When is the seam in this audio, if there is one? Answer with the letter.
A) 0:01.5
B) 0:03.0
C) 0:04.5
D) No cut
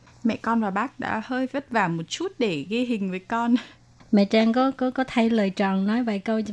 D